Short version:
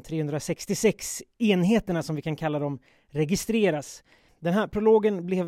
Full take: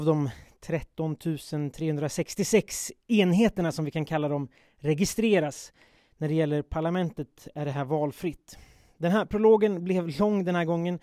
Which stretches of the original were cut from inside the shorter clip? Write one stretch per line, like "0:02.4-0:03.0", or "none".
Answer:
0:06.0-0:08.9